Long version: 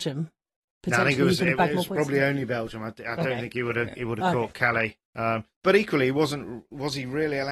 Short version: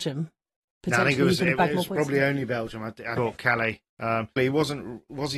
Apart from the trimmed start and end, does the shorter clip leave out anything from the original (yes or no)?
yes